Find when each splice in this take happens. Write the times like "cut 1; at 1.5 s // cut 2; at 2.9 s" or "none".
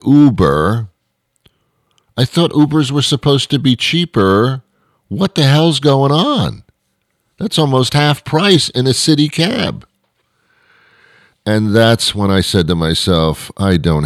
none